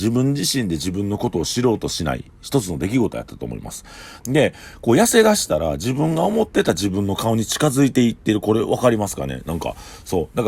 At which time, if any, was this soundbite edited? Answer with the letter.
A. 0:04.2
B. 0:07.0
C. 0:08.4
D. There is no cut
A